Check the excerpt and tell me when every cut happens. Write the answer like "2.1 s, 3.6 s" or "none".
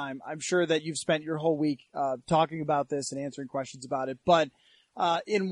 none